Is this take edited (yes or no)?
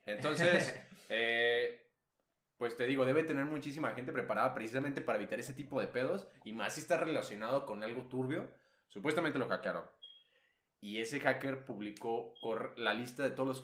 no